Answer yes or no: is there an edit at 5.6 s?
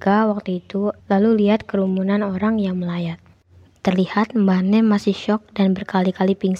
no